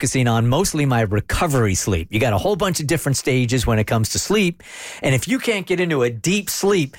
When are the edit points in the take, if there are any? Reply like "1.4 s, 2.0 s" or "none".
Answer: none